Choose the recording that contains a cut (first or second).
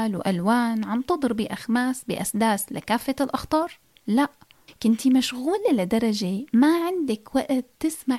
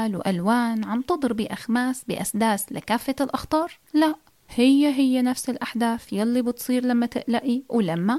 second